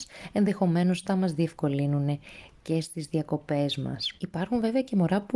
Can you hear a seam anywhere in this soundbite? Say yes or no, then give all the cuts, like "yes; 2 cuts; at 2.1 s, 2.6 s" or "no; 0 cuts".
yes; 1 cut; at 4.2 s